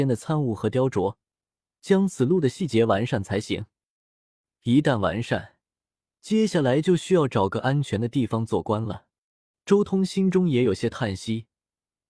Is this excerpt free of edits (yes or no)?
no